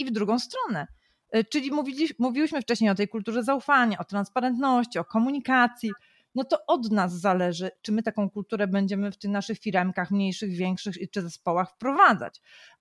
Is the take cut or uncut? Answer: uncut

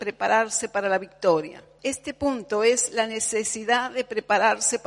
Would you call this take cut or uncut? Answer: cut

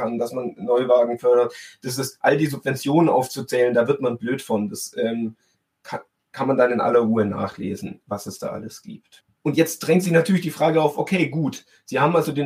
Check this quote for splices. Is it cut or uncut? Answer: uncut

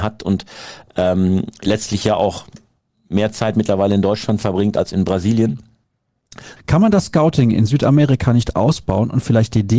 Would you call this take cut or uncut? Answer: cut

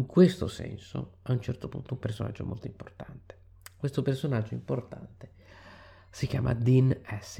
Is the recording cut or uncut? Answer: uncut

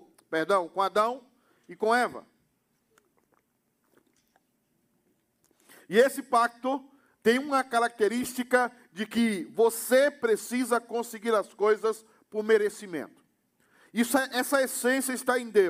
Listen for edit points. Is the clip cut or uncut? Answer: uncut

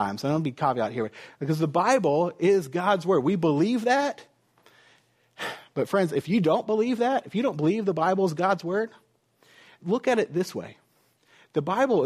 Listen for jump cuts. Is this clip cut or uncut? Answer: cut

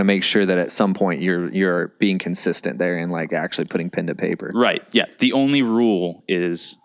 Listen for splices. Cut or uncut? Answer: uncut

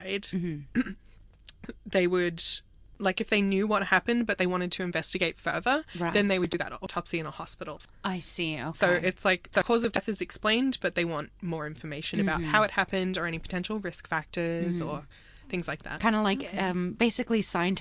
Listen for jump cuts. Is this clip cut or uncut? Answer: uncut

